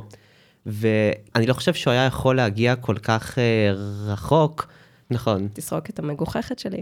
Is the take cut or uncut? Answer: cut